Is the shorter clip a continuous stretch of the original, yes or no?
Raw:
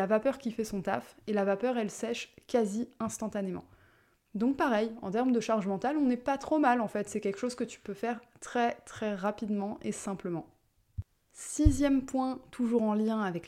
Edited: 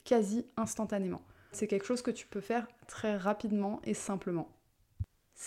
no